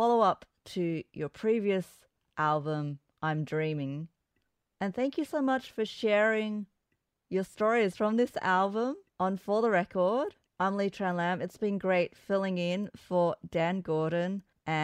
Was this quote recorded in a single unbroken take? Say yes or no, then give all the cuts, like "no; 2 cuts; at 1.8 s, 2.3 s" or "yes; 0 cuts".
no; 1 cut; at 9.1 s